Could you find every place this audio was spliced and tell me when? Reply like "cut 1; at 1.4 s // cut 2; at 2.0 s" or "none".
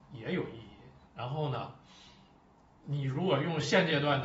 cut 1; at 1.1 s